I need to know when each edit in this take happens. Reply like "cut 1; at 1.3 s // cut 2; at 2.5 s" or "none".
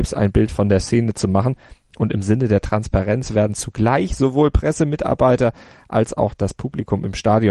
none